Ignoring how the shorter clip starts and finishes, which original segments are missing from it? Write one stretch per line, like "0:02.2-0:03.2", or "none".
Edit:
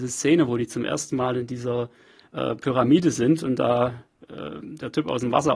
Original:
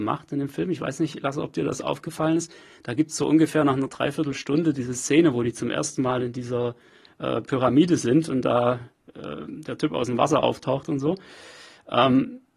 none